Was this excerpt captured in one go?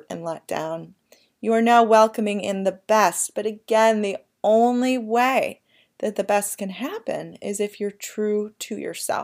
yes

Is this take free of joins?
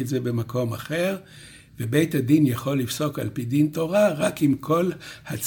no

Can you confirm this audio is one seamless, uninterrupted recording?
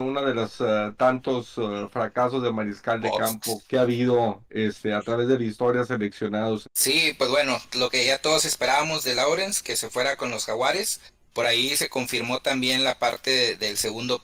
no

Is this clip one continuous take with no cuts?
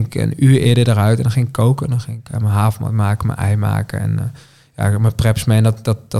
yes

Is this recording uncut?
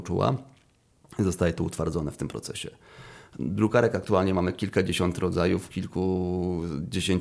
yes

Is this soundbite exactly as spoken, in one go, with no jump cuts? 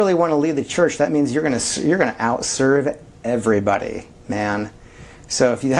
yes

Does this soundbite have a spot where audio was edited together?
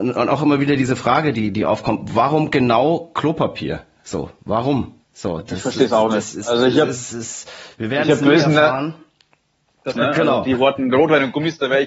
yes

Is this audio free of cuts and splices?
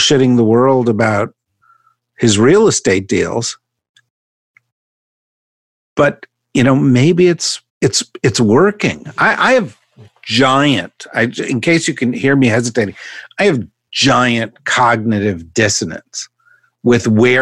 no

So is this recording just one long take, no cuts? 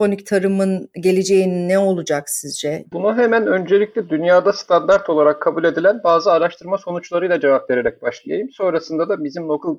no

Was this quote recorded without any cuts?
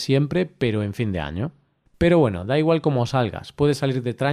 yes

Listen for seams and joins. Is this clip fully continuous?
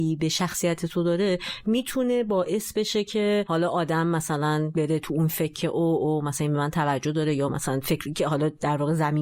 yes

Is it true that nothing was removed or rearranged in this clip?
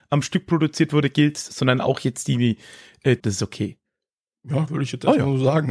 no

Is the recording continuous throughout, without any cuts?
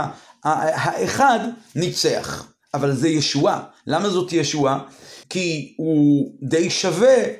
no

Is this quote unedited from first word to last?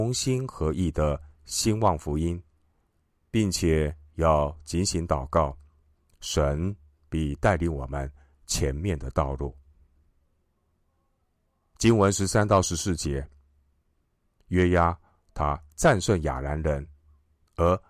yes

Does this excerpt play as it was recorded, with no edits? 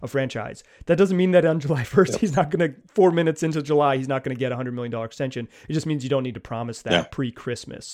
yes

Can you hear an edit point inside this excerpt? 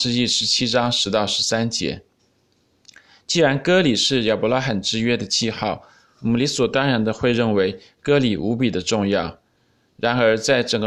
no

